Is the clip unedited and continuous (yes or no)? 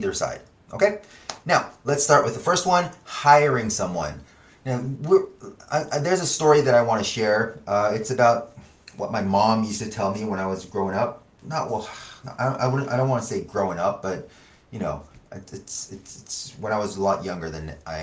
yes